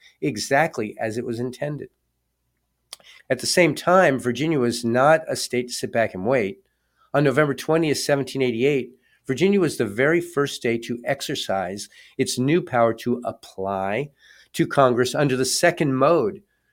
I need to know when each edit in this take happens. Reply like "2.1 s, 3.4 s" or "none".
3.2 s